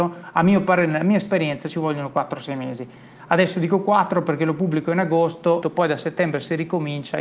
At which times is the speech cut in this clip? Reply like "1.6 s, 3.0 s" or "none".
5.6 s